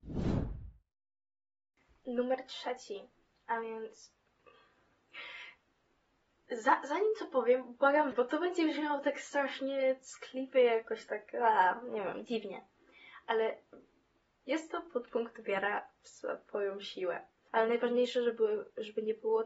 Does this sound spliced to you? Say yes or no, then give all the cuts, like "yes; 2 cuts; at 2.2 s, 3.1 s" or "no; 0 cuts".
yes; 2 cuts; at 8.1 s, 17.5 s